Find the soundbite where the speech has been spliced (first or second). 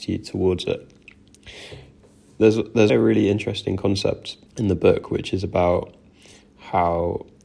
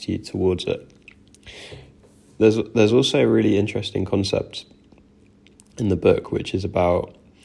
first